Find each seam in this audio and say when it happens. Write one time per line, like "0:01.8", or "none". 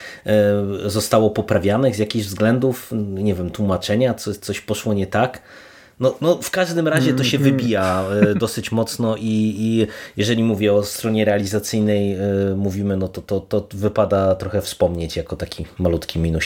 none